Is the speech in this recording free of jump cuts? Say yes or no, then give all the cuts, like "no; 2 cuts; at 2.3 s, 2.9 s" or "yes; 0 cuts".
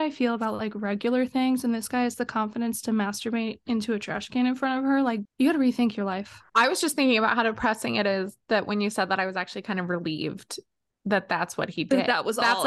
no; 1 cut; at 5.3 s